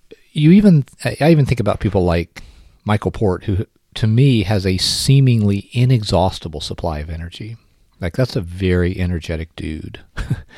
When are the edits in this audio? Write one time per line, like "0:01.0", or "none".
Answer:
none